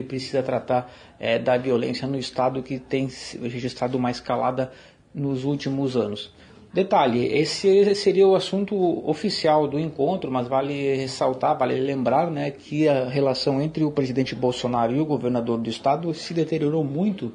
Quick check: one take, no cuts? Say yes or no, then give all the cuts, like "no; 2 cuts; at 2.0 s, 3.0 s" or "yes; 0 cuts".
yes; 0 cuts